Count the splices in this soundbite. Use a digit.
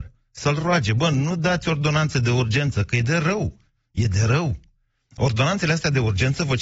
0